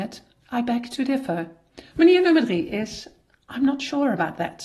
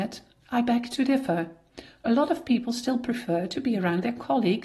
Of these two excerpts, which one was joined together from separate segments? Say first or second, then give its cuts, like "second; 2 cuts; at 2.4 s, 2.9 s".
first; 1 cut; at 1.9 s